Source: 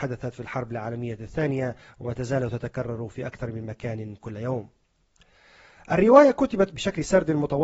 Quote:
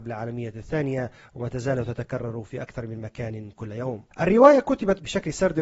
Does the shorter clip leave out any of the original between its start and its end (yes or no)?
yes